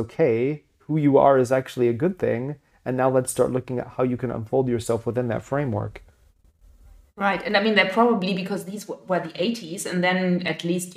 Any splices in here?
no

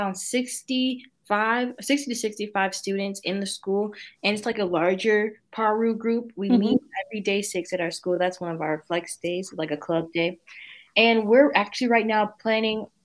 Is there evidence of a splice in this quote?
no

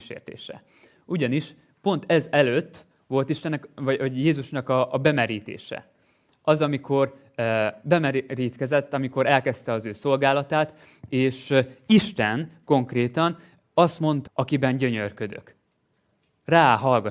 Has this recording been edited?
yes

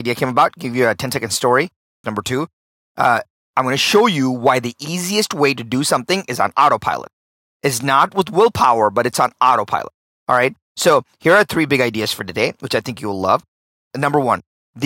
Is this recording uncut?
no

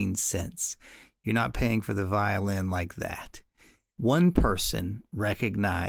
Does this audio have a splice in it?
yes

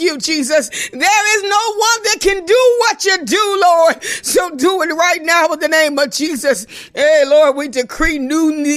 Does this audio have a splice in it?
no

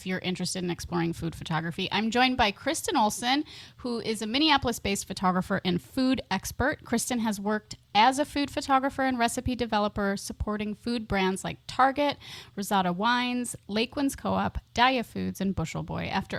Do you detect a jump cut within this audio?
no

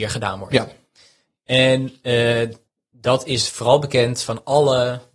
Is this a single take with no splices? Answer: yes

